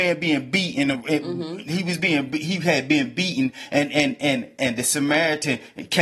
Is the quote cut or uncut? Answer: uncut